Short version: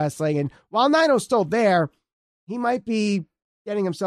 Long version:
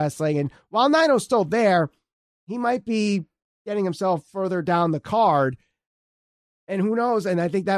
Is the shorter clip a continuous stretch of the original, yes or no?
yes